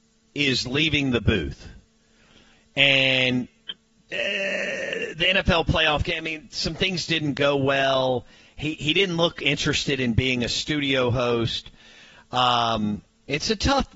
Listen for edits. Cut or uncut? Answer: uncut